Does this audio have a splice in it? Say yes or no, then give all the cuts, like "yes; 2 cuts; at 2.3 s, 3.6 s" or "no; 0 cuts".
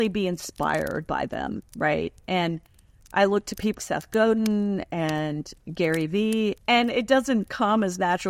yes; 2 cuts; at 3.8 s, 6.6 s